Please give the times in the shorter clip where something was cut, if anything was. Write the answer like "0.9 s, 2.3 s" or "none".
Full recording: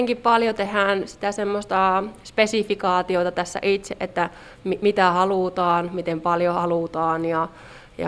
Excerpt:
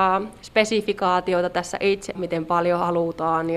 2.2 s